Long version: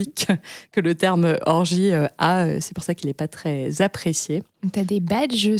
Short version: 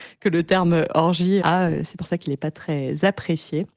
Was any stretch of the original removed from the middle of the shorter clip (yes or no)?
yes